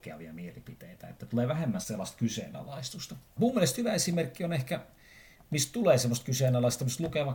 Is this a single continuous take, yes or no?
no